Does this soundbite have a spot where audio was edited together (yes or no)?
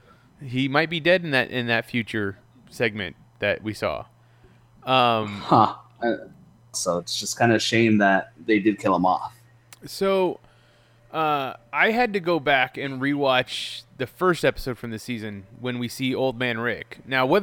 yes